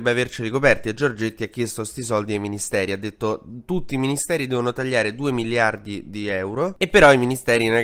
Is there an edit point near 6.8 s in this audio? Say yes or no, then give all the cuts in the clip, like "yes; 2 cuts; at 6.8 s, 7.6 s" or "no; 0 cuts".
no; 0 cuts